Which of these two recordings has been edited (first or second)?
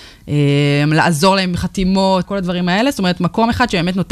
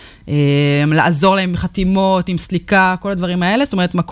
first